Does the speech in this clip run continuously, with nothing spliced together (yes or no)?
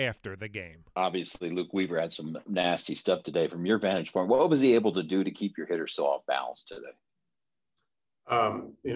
yes